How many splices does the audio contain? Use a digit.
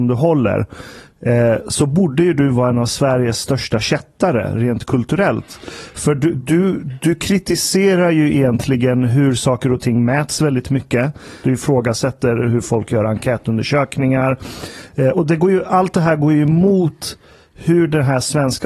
2